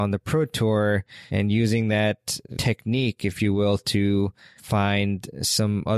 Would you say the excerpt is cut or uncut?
uncut